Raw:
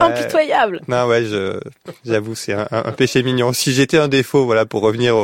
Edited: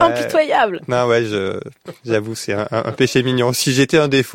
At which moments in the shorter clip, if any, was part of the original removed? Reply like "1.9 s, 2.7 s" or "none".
none